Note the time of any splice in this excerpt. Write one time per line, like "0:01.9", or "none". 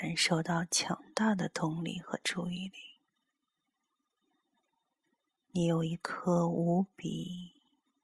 none